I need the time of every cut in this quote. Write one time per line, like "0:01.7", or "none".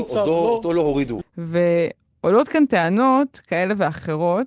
0:01.2